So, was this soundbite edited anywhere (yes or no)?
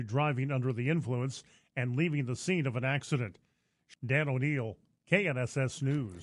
no